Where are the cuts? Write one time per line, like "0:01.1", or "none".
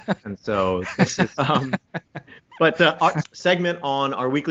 0:01.4
0:03.2